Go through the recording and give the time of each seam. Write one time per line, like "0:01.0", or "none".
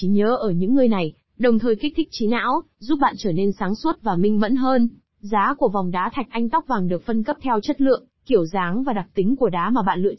0:05.0